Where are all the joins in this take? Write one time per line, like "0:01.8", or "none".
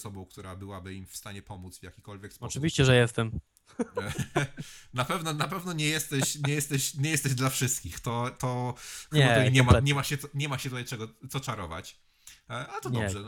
none